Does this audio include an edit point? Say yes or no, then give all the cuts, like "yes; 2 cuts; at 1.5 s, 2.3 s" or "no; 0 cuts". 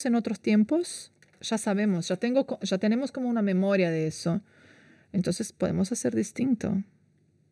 yes; 1 cut; at 1.3 s